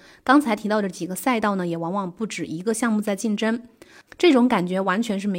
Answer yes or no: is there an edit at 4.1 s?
yes